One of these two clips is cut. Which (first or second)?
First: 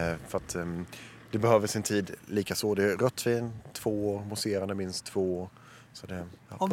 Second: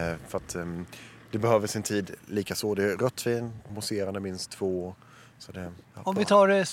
second